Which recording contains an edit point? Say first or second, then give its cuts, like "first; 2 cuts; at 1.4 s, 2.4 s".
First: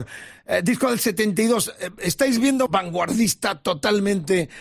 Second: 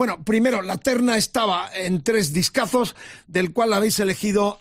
first; 1 cut; at 2.7 s